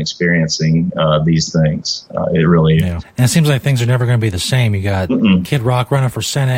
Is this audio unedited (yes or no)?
no